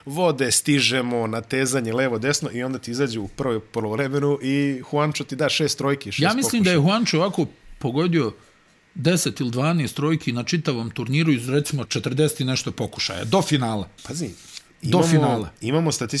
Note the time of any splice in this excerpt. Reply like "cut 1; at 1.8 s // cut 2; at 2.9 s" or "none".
cut 1; at 11.8 s // cut 2; at 14.0 s